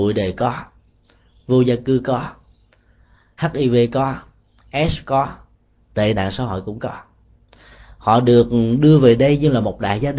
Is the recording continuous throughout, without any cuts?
yes; 0 cuts

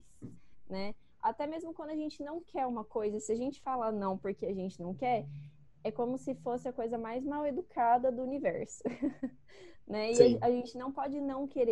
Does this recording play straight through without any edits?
yes; 0 cuts

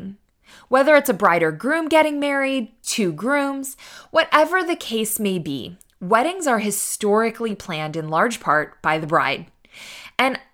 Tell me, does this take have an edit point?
yes; 1 cut; at 2.8 s

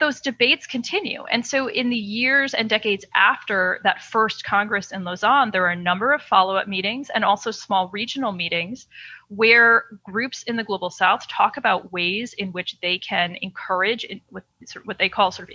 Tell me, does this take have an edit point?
no; 0 cuts

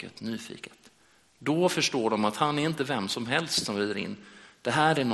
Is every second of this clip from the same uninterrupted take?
yes; 0 cuts

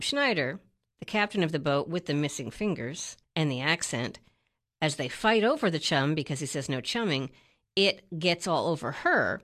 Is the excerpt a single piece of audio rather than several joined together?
yes; 0 cuts

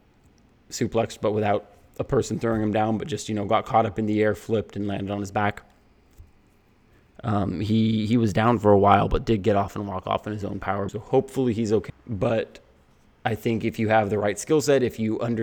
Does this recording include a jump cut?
yes; 2 cuts; at 10.9 s, 11.9 s

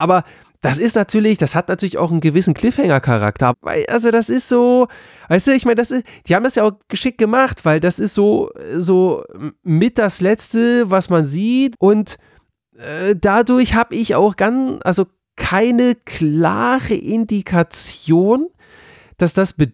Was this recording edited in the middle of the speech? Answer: yes; 2 cuts; at 3.5 s, 11.7 s

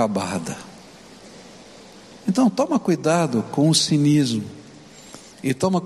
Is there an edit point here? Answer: yes; 1 cut; at 2.1 s

